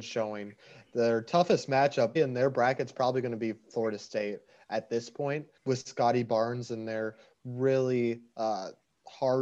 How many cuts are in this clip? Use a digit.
2